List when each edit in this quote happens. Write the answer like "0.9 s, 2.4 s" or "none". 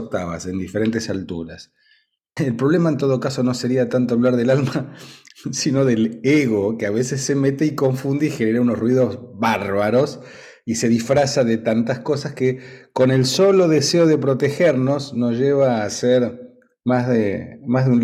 2.4 s